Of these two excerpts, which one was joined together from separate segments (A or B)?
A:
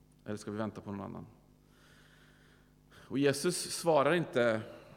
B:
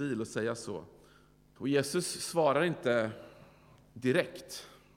B